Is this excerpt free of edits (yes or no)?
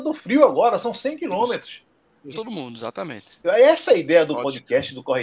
no